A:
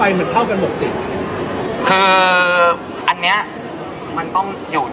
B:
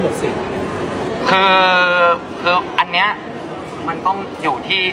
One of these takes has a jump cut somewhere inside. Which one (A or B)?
A